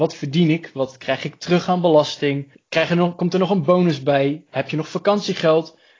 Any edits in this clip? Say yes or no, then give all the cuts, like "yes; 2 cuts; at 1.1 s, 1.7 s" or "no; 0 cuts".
no; 0 cuts